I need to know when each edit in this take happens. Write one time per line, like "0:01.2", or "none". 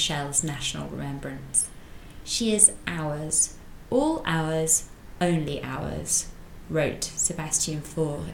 0:02.2